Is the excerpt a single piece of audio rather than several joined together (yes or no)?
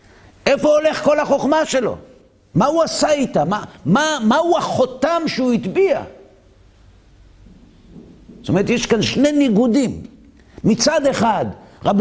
yes